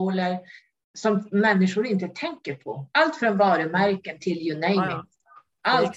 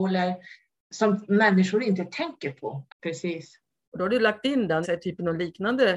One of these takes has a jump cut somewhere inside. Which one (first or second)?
second